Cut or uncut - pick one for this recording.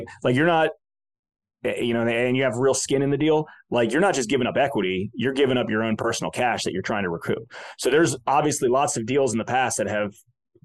uncut